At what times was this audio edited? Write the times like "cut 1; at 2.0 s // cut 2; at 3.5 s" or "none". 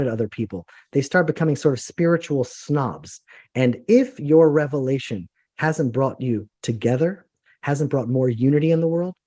cut 1; at 6.5 s